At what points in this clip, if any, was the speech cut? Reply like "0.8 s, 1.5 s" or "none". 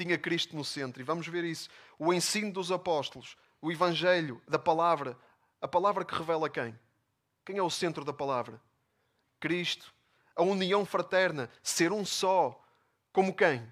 none